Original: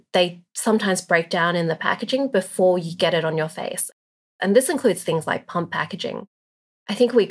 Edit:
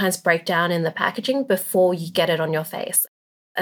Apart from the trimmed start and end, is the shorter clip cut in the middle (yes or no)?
no